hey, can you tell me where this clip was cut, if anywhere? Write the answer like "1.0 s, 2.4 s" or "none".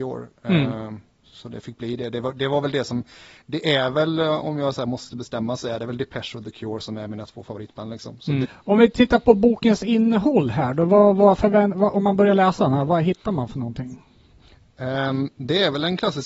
8.4 s